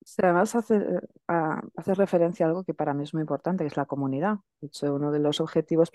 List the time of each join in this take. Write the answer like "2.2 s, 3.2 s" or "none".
none